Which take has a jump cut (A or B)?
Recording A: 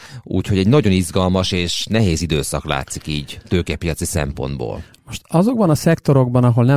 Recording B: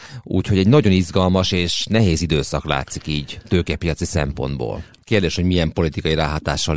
B